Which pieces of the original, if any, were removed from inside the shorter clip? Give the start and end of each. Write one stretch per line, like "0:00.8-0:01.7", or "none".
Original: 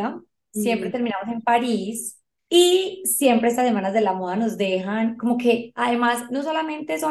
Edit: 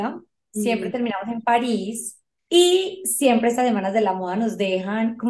none